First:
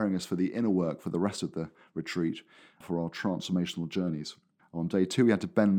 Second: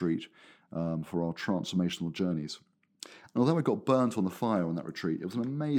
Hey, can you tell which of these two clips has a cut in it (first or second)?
first